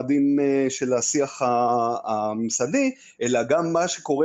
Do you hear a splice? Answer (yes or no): no